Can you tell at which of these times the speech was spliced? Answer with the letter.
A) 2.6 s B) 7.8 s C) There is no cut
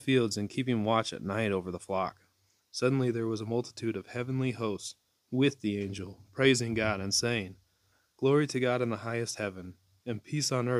A